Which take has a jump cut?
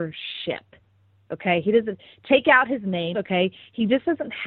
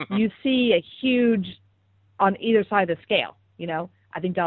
first; 1 cut; at 3.1 s

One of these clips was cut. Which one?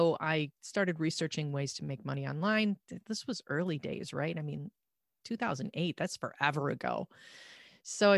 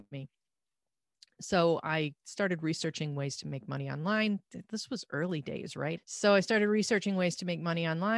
second; 1 cut; at 6.0 s

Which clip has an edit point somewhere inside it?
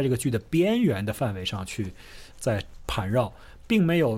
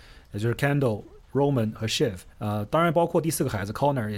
second; 1 cut; at 2.3 s

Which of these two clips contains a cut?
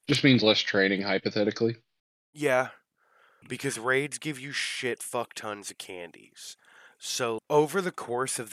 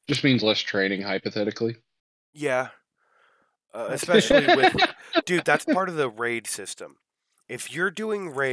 first; 2 cuts; at 3.4 s, 7.4 s

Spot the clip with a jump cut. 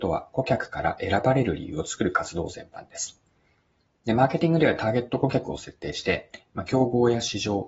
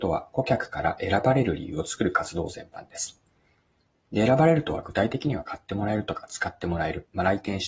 first; 1 cut; at 4.0 s

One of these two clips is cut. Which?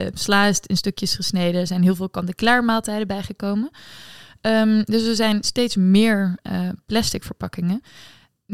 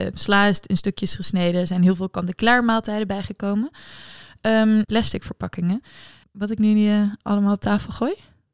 second; 2 cuts; at 4.8 s, 6.2 s

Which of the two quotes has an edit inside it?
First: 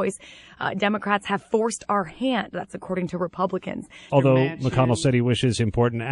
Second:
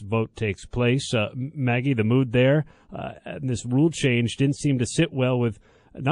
first; 1 cut; at 4.1 s

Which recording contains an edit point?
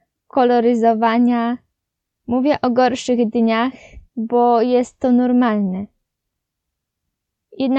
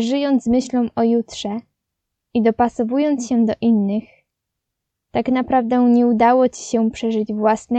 first; 2 cuts; at 2.1 s, 4.1 s

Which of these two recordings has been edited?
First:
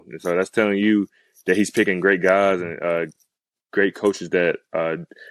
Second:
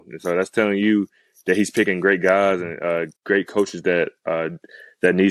second; 1 cut; at 3.1 s

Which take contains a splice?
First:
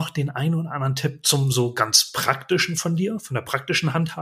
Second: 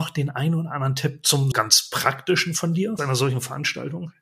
second; 2 cuts; at 1.5 s, 3.0 s

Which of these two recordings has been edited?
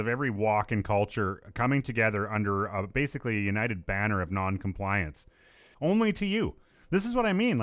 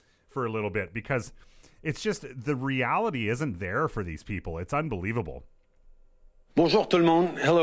first; 1 cut; at 5.7 s

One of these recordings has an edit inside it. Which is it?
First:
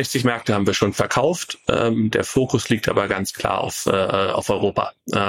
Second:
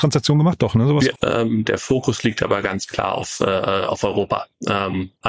second; 1 cut; at 1.2 s

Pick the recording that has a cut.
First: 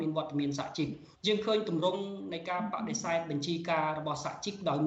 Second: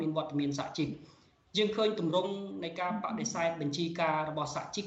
first; 1 cut; at 1.1 s

